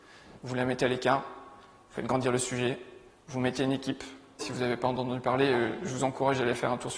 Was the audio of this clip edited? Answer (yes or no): yes